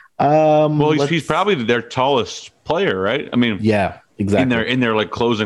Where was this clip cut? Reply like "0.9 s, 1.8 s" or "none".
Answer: none